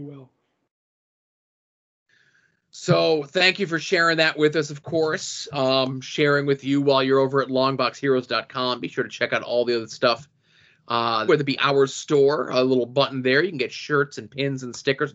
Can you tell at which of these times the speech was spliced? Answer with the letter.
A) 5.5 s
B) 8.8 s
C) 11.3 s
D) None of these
C